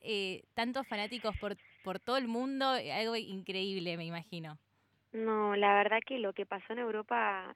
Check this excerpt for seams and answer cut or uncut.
uncut